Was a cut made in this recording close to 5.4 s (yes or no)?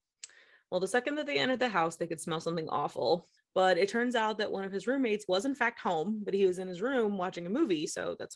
no